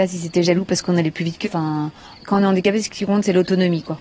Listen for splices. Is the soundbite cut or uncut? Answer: cut